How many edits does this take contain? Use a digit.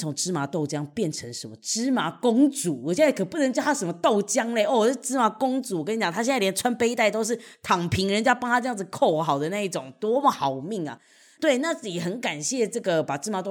0